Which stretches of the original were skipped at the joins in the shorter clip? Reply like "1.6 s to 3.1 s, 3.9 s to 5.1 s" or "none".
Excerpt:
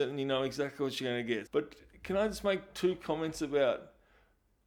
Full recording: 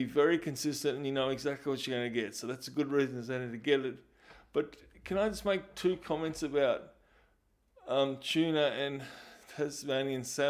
2.3 s to 4.5 s

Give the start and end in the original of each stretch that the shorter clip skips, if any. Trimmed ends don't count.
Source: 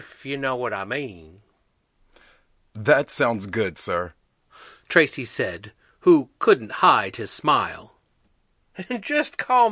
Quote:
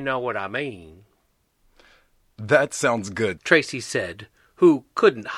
3.7 s to 4.8 s

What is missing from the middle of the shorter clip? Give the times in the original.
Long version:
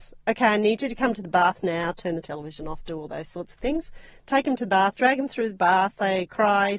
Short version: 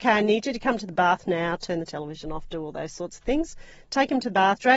none

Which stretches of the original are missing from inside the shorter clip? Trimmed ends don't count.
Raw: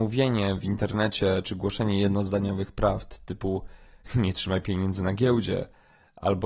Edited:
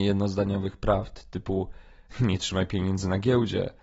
none

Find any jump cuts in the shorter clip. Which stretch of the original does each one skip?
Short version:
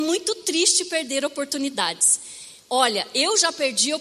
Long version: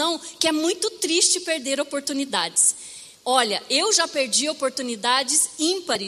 none

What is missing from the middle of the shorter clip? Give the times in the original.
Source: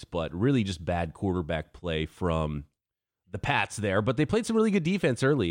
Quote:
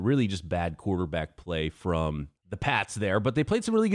2.7 s to 3.2 s

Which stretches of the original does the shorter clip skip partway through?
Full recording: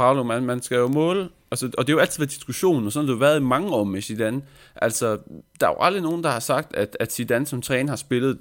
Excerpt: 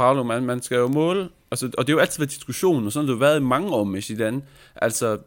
none

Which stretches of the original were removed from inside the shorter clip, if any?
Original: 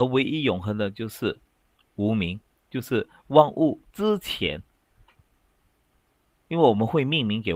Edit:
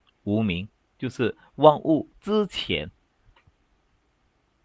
none

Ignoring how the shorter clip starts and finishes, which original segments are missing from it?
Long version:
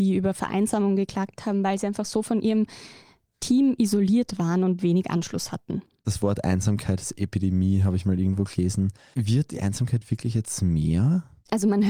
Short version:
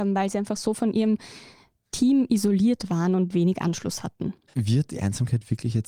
6.0 s to 9.1 s

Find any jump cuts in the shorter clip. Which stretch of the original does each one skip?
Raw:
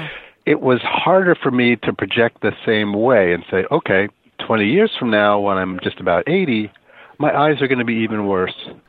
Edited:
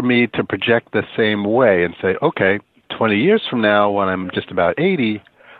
none

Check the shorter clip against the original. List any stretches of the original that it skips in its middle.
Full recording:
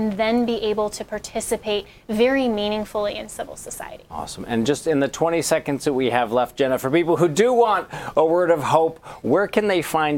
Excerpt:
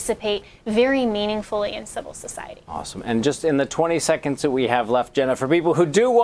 none

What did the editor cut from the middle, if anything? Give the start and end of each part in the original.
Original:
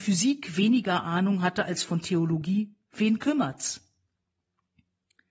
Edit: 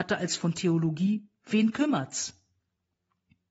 none

